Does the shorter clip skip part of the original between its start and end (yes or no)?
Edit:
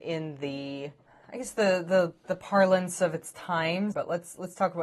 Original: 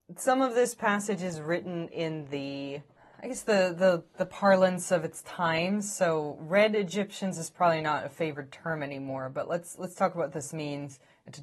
yes